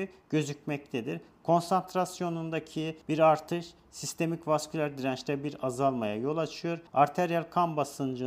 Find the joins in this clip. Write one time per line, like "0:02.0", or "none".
none